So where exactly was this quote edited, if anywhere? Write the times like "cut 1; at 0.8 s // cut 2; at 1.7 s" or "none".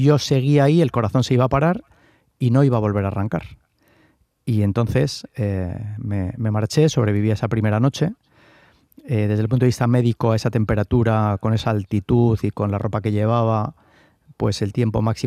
none